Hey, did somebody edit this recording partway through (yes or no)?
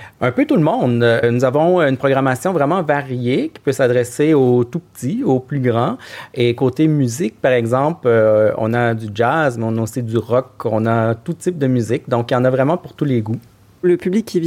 no